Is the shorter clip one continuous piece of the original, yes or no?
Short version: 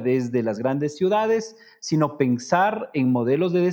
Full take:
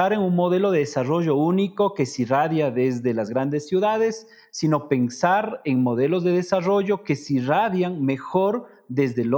yes